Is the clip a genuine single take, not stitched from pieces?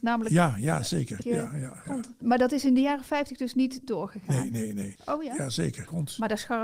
no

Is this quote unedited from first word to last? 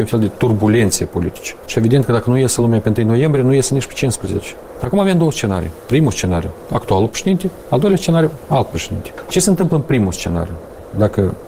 no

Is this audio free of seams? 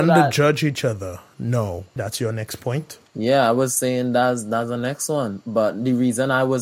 no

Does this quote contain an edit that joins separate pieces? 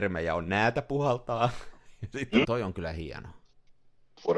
yes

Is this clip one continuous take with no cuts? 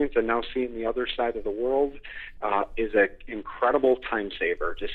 no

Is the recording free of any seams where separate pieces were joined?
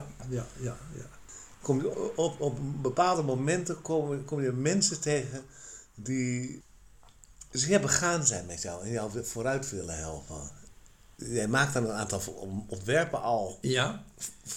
yes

